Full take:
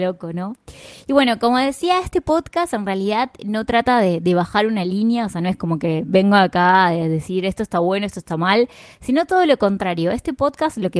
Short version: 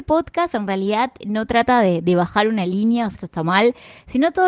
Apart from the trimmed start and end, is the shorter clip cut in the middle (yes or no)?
yes